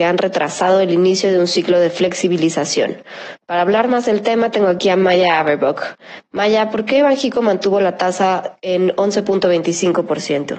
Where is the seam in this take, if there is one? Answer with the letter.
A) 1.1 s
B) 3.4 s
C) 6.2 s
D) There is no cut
D